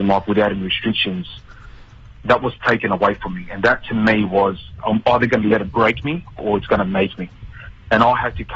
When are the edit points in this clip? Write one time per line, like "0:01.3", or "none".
0:04.8